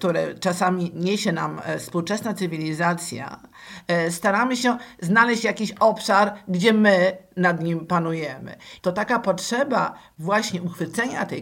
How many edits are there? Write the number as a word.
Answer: one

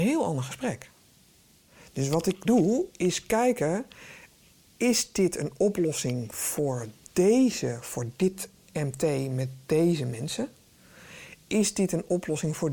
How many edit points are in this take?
zero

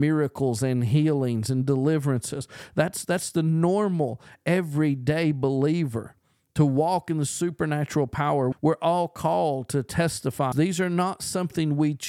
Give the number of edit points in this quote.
two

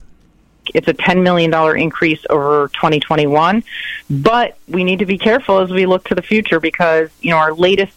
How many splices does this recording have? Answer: one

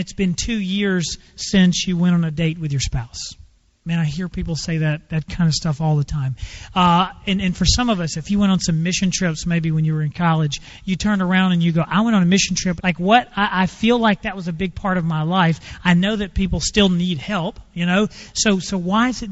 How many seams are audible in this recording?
one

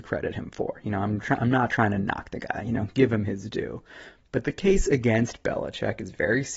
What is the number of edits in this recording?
zero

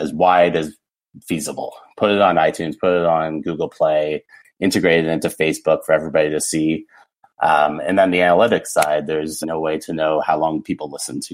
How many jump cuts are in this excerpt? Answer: two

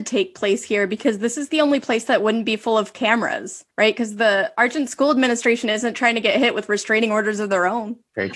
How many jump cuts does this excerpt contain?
one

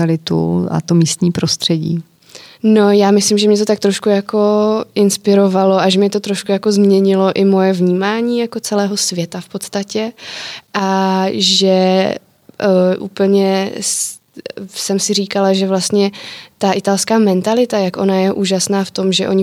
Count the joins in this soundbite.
zero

